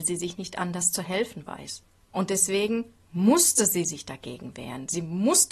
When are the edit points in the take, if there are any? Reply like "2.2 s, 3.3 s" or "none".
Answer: 2.1 s